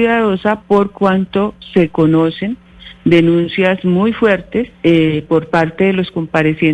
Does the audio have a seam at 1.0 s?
no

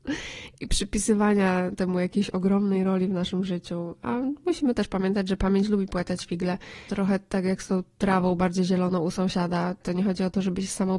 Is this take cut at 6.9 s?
yes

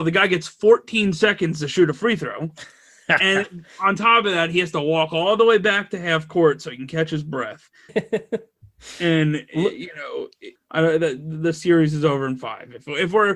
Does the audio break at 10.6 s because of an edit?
yes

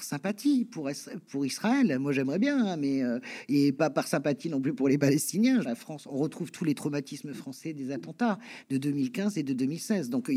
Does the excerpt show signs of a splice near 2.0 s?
no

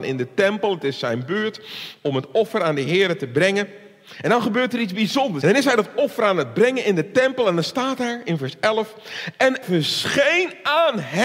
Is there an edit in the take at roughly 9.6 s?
yes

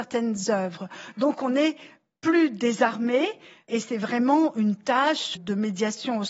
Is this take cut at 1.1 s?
no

